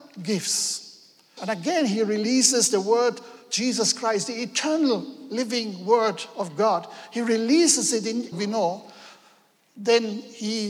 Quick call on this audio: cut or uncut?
cut